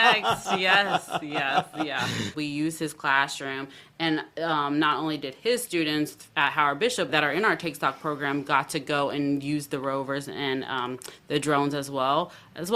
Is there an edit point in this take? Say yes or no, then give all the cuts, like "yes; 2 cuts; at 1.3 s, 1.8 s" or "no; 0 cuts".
yes; 2 cuts; at 2.3 s, 7.1 s